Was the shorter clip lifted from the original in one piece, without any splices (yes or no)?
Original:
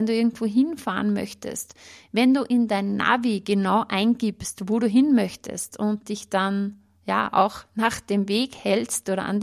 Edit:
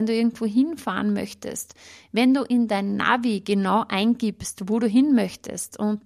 yes